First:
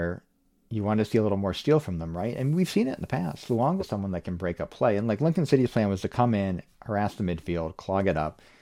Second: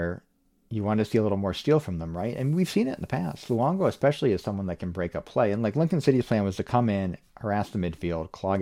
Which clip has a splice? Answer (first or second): first